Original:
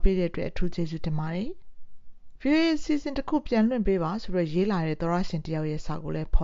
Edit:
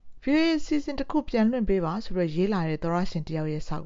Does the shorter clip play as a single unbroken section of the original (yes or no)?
yes